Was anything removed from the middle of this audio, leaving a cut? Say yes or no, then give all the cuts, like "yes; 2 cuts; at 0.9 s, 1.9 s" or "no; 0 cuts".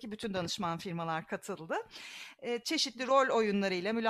no; 0 cuts